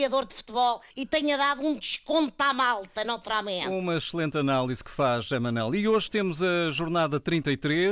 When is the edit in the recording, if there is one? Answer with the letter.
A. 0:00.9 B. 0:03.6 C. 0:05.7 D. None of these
A